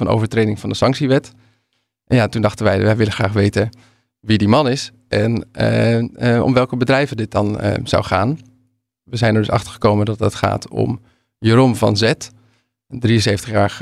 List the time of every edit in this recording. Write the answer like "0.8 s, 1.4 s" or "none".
none

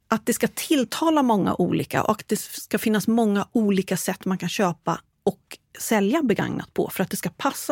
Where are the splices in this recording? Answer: none

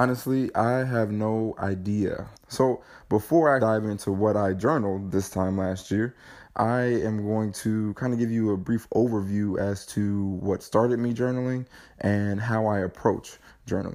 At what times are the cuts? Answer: 2.3 s, 3.6 s

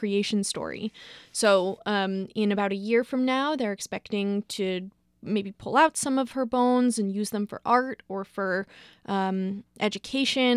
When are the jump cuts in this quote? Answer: none

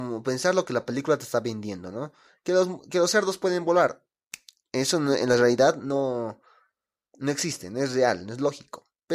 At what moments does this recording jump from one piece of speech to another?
none

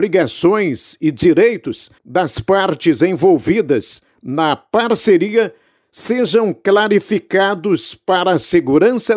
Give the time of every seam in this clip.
2.0 s

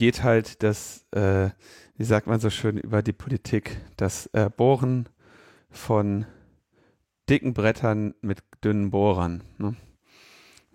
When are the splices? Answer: none

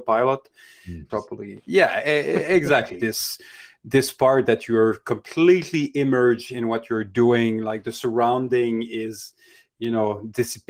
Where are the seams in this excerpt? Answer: 1.1 s, 3.0 s

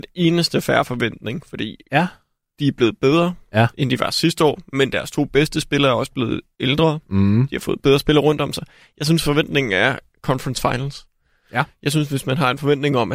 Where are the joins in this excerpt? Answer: none

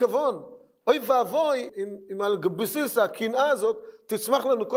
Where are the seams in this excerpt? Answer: 1.7 s

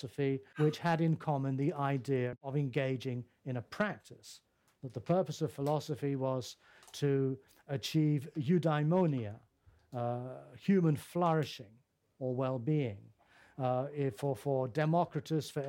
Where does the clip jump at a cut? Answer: none

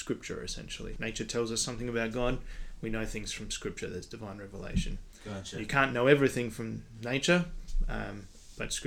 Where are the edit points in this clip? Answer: 1.0 s

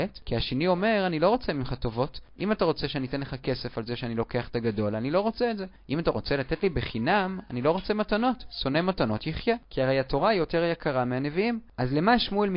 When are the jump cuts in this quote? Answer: 9.6 s

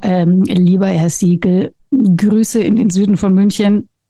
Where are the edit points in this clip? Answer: 1.8 s

